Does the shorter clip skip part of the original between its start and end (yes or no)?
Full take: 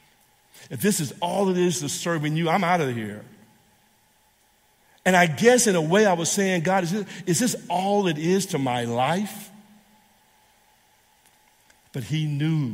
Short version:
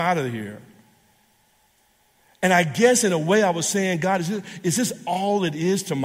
no